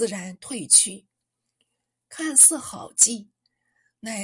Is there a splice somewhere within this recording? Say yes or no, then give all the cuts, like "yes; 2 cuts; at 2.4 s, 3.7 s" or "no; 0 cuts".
no; 0 cuts